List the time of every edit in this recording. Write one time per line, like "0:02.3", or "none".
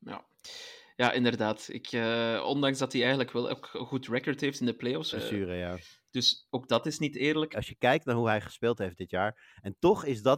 0:05.1
0:07.5

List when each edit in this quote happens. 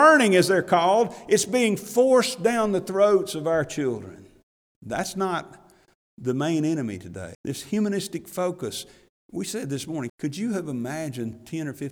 0:04.7
0:07.3
0:10.1

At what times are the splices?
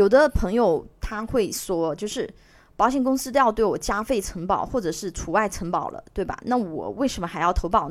none

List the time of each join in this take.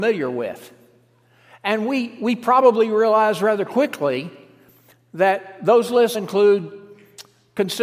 0:06.1

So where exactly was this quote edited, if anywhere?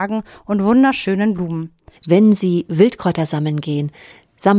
0:02.0

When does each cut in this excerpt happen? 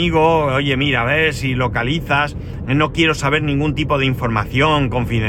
0:02.6

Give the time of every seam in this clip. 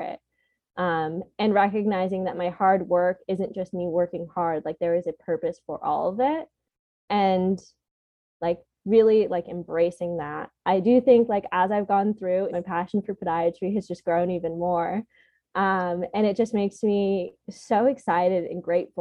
0:12.5

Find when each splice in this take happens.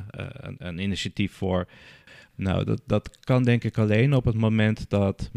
0:02.3

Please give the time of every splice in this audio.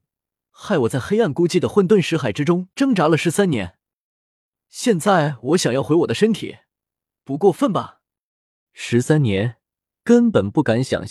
0:08.7

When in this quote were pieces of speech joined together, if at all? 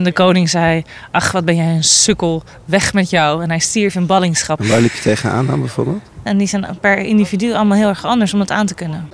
0:04.6
0:06.3

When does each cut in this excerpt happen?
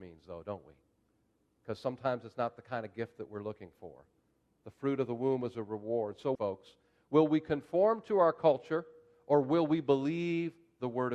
0:06.3

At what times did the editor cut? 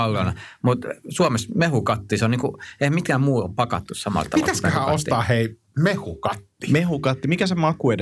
none

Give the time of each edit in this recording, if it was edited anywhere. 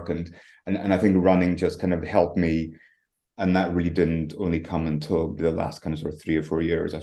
0:03.3
0:05.4

